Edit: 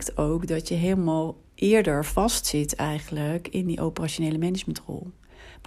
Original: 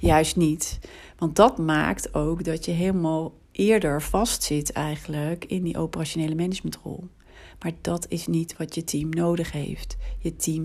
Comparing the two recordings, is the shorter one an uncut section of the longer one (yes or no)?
yes